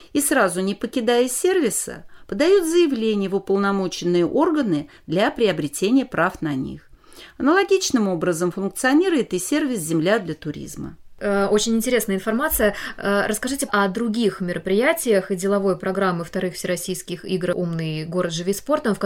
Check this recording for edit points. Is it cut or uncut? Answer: cut